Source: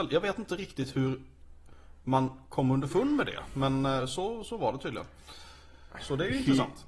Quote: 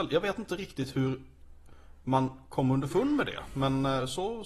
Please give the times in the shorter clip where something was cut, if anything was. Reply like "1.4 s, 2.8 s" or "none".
none